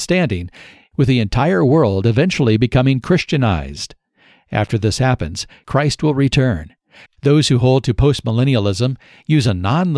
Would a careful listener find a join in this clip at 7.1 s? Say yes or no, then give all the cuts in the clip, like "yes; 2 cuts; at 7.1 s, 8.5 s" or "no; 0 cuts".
yes; 1 cut; at 7.1 s